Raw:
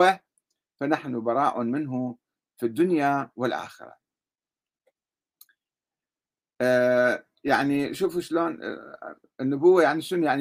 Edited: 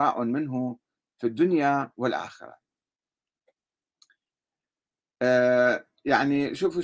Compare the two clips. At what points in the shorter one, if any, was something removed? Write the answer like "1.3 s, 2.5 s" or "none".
none